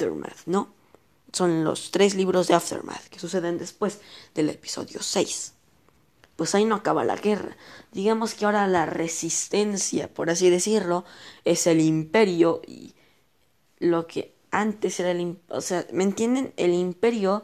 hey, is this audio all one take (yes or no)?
yes